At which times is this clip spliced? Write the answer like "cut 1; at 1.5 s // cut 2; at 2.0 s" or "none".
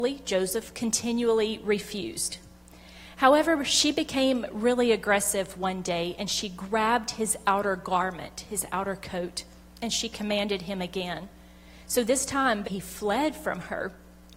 cut 1; at 12.6 s